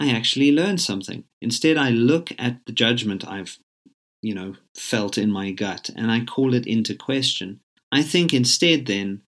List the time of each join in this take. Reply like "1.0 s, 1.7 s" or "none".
1.3 s